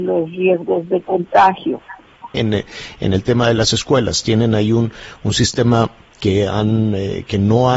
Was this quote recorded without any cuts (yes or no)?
no